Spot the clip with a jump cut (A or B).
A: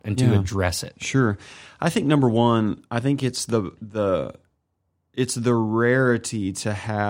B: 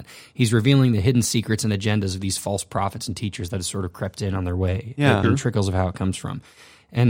B